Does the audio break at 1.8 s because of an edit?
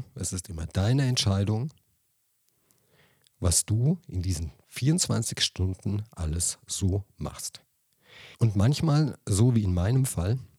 no; 1 cut; at 8.3 s

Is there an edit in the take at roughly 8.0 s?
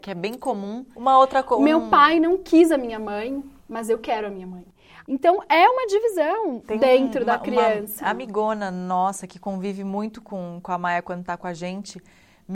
no; 3 cuts; at 0.9 s, 3.6 s, 5.0 s

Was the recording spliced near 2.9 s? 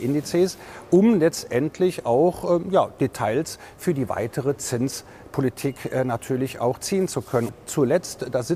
no; 1 cut; at 7.5 s

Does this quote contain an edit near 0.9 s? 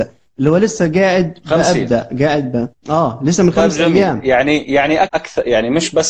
no; 2 cuts; at 2.8 s, 5.1 s

